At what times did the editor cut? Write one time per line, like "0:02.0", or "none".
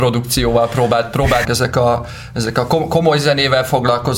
0:01.4